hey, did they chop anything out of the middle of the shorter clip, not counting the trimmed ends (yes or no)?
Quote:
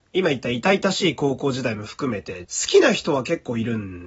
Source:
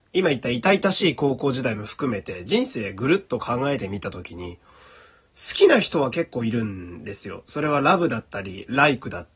yes